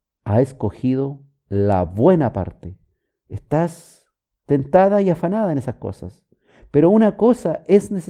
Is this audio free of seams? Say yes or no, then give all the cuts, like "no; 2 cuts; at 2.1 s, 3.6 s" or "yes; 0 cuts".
no; 1 cut; at 3.1 s